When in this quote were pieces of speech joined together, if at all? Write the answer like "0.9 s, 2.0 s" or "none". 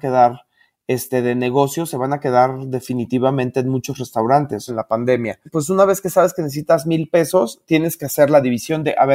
4.7 s